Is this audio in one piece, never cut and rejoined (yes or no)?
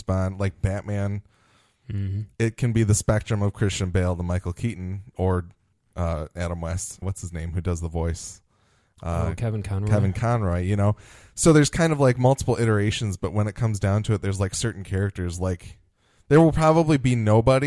no